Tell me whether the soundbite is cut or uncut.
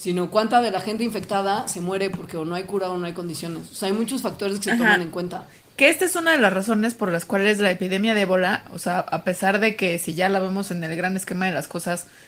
uncut